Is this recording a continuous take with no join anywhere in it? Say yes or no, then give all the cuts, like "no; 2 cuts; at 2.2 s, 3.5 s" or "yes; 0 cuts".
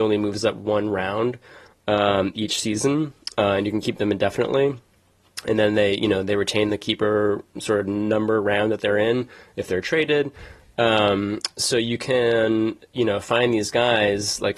yes; 0 cuts